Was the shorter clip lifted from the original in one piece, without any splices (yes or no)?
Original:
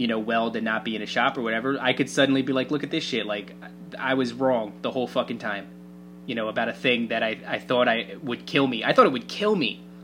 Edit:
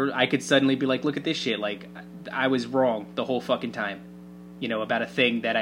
yes